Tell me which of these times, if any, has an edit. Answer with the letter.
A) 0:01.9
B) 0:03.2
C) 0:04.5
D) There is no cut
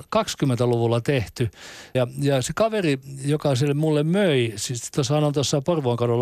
A